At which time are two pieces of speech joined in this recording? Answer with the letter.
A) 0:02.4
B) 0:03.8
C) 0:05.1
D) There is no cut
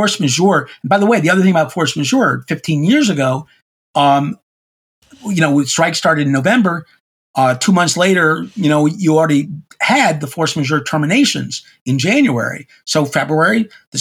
D